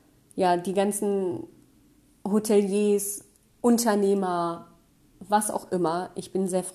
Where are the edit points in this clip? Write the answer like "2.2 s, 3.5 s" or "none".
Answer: 3.5 s